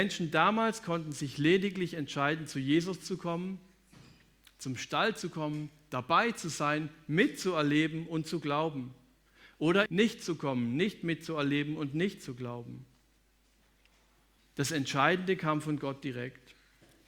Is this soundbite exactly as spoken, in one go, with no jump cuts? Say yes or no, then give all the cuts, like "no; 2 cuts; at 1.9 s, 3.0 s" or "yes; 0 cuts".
no; 2 cuts; at 9.9 s, 14.4 s